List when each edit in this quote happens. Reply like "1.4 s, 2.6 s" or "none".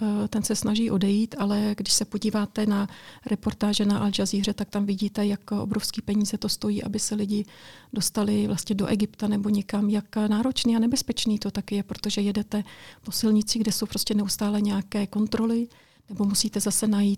none